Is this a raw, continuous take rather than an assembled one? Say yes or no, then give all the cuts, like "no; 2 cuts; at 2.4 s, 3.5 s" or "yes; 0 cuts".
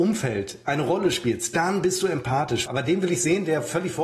no; 1 cut; at 2.7 s